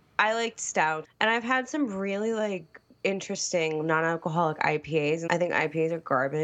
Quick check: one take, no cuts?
no; 2 cuts; at 1.0 s, 5.3 s

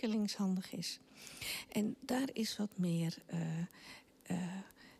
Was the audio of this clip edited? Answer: no; 0 cuts

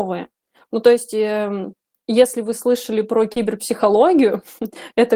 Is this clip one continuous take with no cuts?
yes; 0 cuts

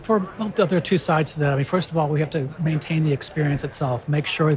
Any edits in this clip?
no; 0 cuts

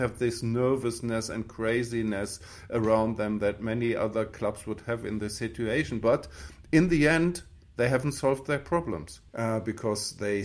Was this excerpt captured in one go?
no; 1 cut; at 9.3 s

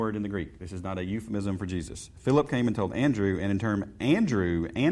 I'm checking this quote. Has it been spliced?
no; 0 cuts

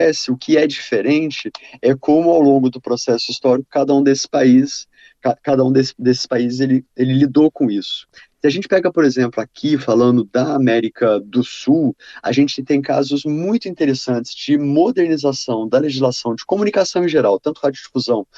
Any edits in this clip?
no; 0 cuts

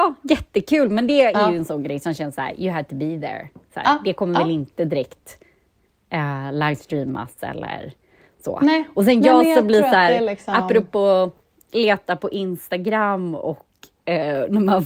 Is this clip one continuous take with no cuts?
no; 1 cut; at 1.7 s

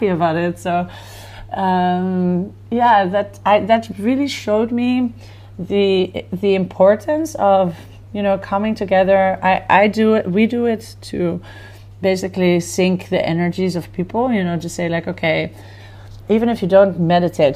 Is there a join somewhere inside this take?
no; 0 cuts

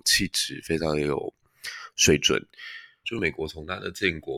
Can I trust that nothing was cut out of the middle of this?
no; 1 cut; at 3.0 s

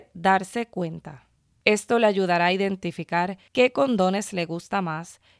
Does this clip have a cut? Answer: yes; 2 cuts; at 1.5 s, 3.5 s

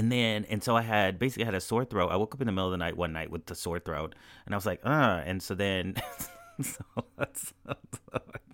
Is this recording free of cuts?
yes; 0 cuts

